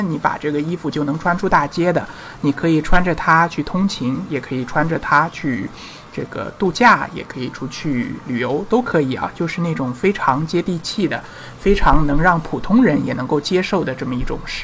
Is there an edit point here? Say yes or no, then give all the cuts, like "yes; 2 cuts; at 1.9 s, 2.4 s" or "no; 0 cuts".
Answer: no; 0 cuts